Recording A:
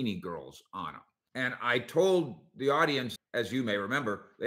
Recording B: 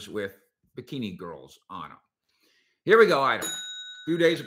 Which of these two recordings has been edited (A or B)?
A